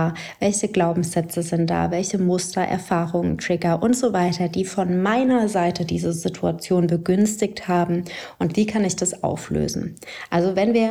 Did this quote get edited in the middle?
no; 0 cuts

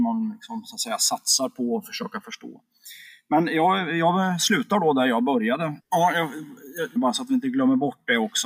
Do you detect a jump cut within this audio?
yes; 2 cuts; at 5.8 s, 7.0 s

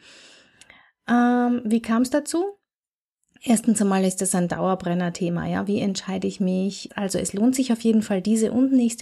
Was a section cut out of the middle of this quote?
yes; 1 cut; at 6.9 s

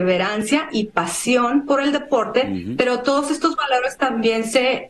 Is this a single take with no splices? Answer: yes; 0 cuts

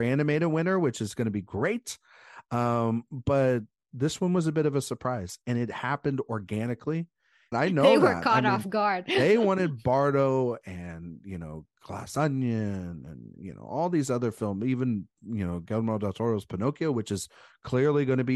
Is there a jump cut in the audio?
yes; 1 cut; at 7.5 s

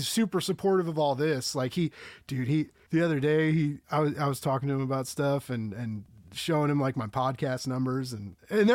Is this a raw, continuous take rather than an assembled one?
yes; 0 cuts

